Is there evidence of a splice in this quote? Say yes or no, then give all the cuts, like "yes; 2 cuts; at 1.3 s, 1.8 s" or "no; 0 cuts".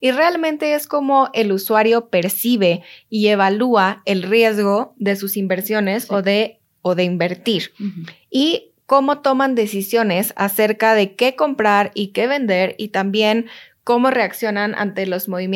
no; 0 cuts